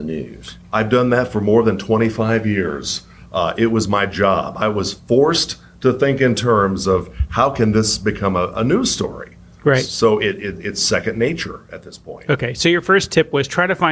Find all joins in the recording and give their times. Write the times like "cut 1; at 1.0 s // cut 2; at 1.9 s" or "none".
none